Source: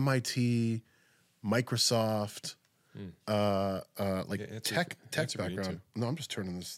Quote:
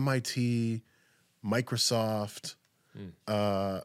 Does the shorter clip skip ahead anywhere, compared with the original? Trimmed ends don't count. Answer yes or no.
no